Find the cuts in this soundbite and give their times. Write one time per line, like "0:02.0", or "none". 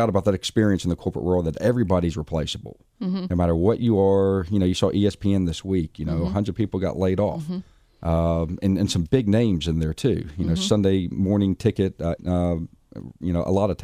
0:12.2